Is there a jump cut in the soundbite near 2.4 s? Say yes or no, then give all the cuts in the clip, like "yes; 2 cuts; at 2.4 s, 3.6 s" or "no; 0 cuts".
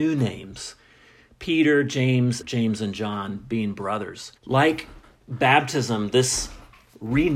yes; 2 cuts; at 2.4 s, 4.4 s